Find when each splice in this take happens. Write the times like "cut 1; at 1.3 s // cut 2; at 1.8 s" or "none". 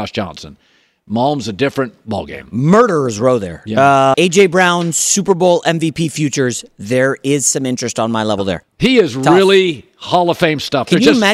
cut 1; at 4.1 s // cut 2; at 8.6 s